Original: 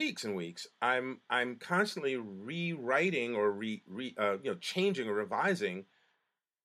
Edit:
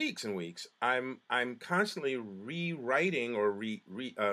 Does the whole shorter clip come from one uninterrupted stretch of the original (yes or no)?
yes